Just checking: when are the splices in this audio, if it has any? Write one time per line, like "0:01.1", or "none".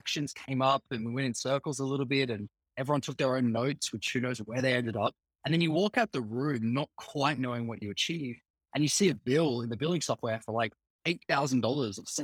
none